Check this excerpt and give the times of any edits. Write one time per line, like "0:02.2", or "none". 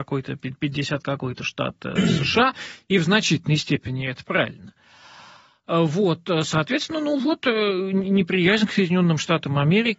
none